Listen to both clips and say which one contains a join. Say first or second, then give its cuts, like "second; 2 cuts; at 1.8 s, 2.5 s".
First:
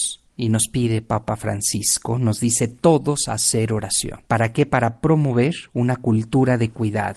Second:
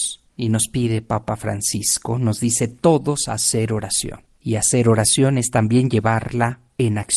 first; 1 cut; at 4.3 s